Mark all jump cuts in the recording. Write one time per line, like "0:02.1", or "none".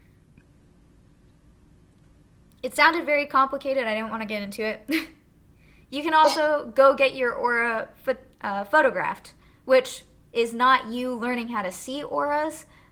none